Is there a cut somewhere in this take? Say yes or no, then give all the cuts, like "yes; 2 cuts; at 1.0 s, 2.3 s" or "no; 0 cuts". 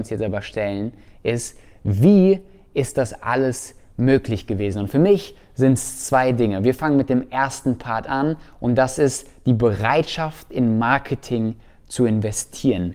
no; 0 cuts